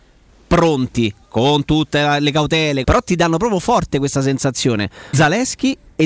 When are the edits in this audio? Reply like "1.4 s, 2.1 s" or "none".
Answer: 2.8 s, 5.1 s